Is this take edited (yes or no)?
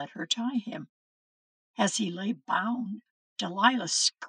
no